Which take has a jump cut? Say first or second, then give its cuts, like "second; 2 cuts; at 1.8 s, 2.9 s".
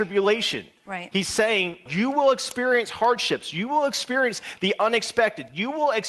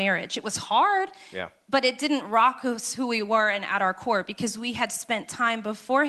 first; 1 cut; at 1.9 s